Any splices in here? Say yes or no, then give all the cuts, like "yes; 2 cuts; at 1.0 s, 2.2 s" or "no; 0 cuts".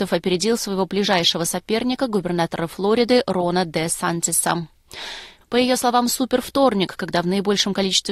yes; 1 cut; at 5.4 s